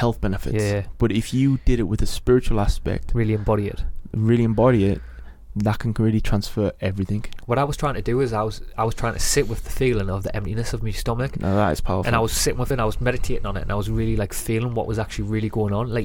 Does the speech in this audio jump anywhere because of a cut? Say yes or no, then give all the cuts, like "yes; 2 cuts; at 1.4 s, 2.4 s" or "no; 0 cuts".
no; 0 cuts